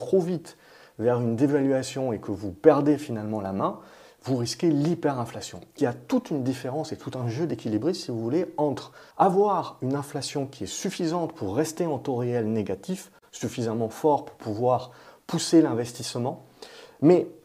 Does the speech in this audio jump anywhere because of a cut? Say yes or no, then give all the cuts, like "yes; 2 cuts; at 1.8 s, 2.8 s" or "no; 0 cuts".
yes; 2 cuts; at 5.8 s, 9.1 s